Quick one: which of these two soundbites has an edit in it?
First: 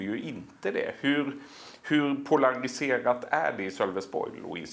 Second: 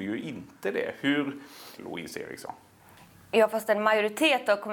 second; 1 cut; at 1.8 s

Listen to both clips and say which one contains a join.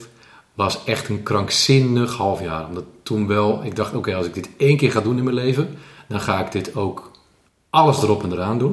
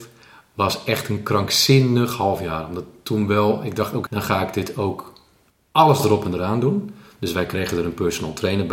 second; 1 cut; at 4.1 s

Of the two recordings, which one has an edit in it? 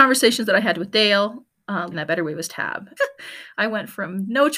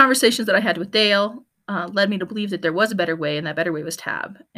first; 2 cuts; at 1.9 s, 3.0 s

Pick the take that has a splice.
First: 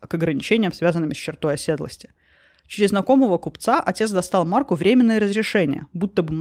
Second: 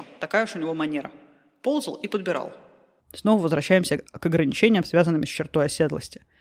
second; 1 cut; at 3.0 s

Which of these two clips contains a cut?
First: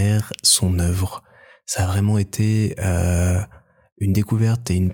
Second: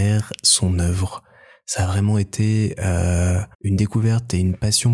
second; 1 cut; at 3.5 s

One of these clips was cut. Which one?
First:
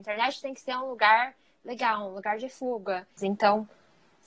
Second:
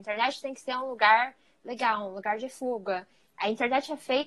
first; 1 cut; at 3.2 s

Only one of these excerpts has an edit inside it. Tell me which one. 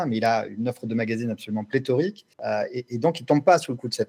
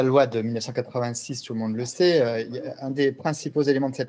first; 1 cut; at 2.3 s

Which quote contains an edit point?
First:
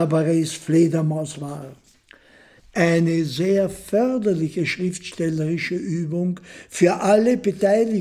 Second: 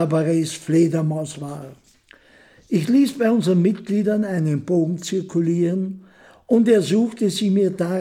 first; 1 cut; at 2.6 s

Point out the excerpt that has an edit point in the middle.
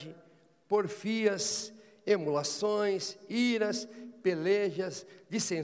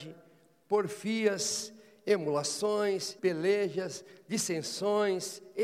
second; 1 cut; at 3.2 s

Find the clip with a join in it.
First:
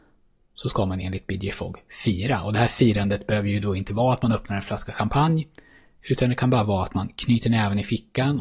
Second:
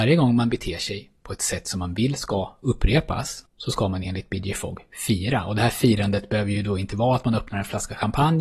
second; 1 cut; at 3.5 s

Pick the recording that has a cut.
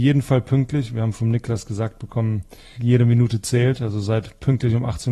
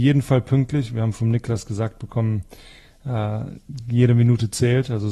first; 1 cut; at 2.8 s

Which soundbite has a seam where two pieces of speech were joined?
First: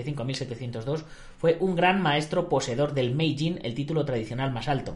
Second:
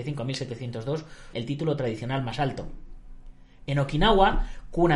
second; 1 cut; at 1.3 s

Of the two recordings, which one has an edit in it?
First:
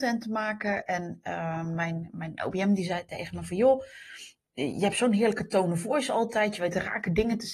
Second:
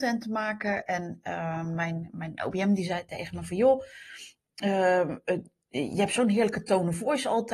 first; 1 cut; at 4.5 s

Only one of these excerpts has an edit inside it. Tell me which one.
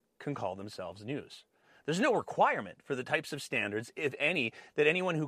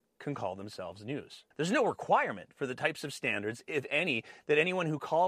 second; 1 cut; at 1.5 s

